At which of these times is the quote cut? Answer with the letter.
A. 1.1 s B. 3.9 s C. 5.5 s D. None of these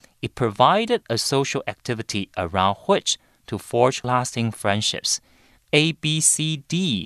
C